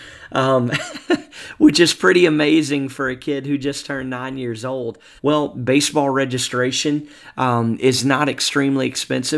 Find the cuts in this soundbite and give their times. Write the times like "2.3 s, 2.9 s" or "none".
5.2 s